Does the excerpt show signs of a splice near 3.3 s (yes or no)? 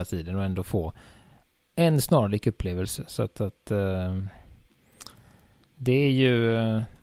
no